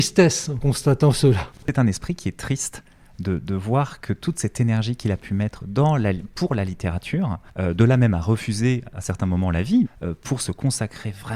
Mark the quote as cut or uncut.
cut